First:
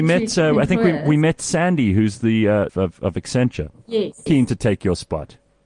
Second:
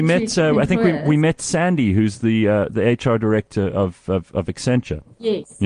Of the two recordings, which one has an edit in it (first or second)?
first